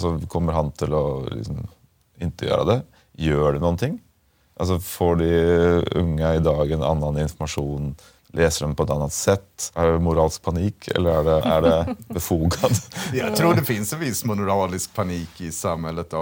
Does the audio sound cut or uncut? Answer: cut